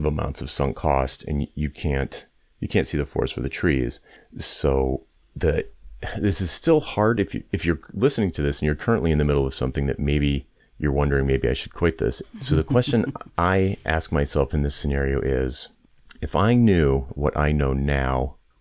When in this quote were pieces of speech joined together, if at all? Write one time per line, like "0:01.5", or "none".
0:12.2
0:17.1